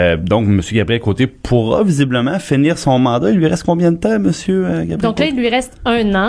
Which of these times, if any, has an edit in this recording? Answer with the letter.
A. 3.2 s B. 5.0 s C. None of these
C